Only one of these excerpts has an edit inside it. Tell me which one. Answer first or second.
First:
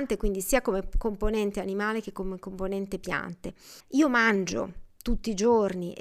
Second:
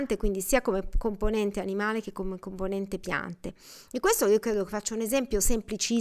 first